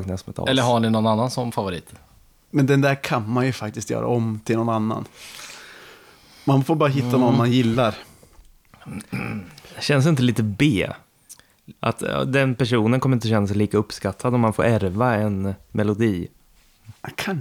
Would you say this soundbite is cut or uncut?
uncut